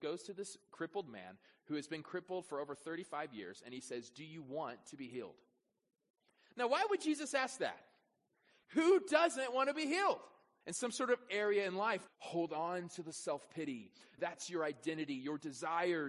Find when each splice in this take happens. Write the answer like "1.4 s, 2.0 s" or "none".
10.6 s, 12.1 s, 14.2 s